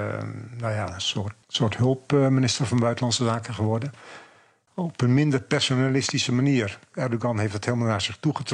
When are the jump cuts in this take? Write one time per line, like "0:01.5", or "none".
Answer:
0:01.4
0:04.7